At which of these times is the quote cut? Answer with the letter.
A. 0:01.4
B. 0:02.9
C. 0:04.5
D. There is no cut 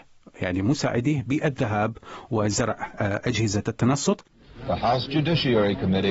D